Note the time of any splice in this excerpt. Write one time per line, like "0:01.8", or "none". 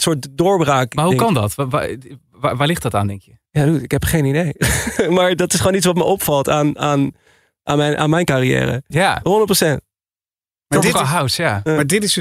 0:03.5
0:08.9